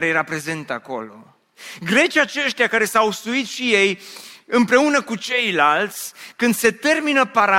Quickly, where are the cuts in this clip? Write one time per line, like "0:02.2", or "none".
none